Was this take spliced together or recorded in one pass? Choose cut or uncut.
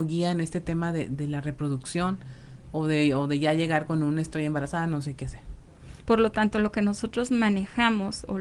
cut